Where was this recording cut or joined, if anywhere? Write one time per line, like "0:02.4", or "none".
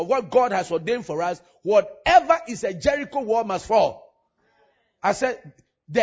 none